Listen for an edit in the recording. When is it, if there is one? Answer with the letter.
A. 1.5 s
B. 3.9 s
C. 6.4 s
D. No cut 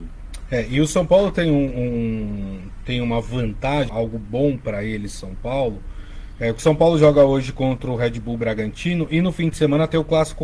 B